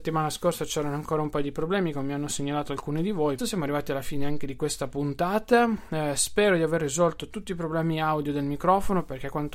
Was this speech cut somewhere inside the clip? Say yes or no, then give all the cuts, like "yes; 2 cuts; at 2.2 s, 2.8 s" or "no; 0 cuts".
yes; 1 cut; at 3.4 s